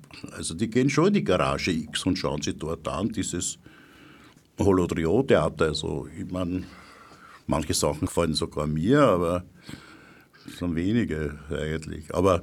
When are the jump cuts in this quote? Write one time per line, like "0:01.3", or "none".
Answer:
none